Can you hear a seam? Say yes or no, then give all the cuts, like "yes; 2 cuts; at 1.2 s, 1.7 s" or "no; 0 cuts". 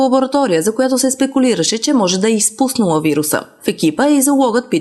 yes; 1 cut; at 3.6 s